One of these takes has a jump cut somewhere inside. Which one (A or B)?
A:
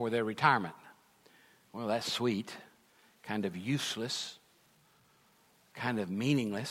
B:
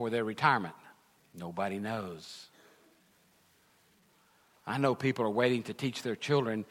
B